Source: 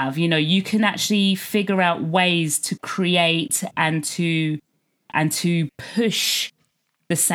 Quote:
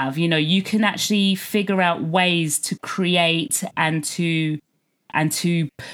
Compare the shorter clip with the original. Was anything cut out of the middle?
no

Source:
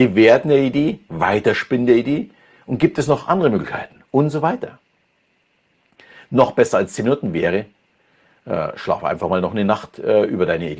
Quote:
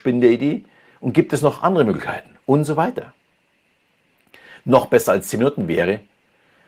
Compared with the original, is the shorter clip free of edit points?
yes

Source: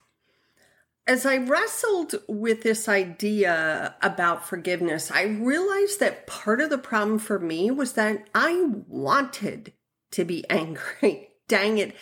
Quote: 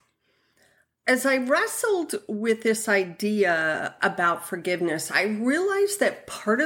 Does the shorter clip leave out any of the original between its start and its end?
no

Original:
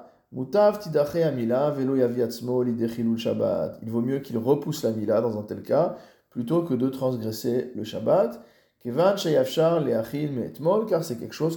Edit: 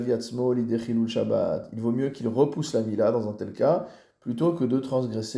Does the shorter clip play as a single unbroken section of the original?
yes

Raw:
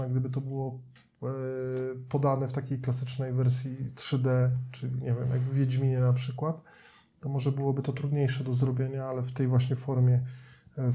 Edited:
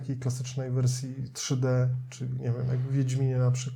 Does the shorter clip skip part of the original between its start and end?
no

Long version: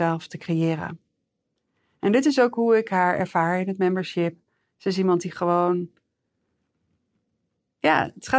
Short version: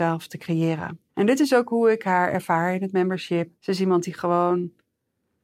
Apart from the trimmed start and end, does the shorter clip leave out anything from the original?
yes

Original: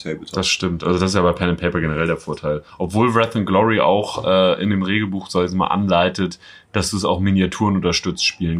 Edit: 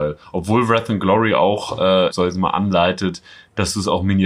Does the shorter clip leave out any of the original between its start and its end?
yes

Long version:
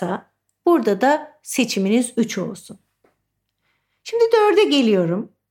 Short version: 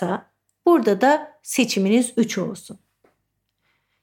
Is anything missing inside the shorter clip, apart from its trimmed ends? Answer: no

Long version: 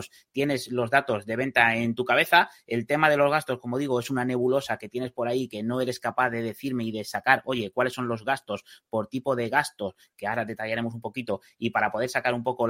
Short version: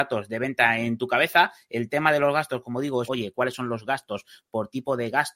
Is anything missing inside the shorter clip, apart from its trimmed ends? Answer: yes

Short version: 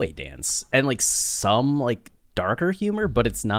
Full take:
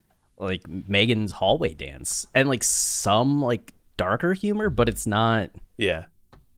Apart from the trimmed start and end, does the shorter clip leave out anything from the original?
no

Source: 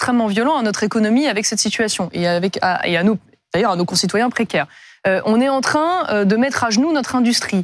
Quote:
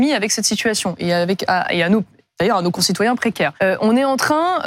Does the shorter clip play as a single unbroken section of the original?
no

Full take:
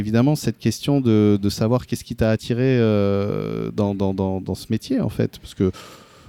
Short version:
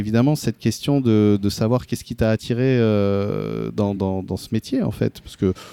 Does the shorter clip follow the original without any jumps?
no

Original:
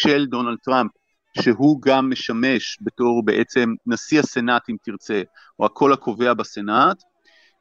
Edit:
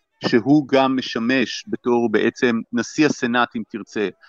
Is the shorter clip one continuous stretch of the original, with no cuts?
yes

